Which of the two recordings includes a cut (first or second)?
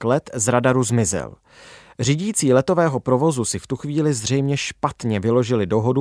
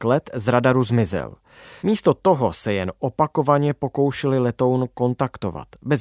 second